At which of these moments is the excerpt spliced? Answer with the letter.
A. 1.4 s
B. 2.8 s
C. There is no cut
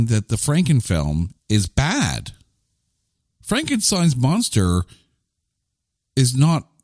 A